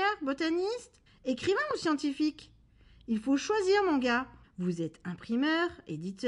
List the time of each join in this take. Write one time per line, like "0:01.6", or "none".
0:01.1
0:04.4